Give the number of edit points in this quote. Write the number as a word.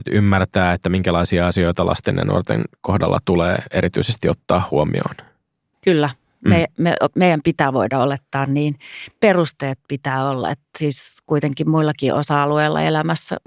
zero